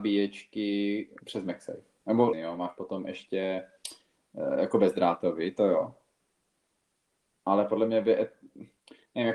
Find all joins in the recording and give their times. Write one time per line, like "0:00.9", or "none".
0:02.3